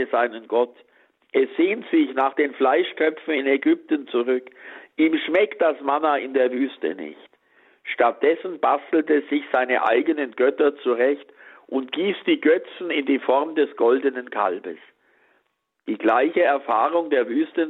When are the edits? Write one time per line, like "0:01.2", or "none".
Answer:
none